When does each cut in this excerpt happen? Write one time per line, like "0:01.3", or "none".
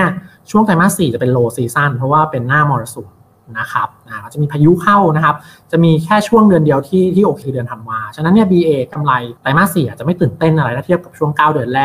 0:07.4
0:09.4